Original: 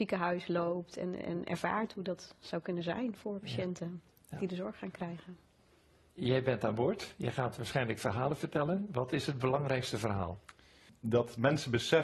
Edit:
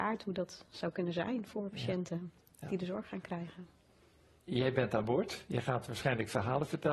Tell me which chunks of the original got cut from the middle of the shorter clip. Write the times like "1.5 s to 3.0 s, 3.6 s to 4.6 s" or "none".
none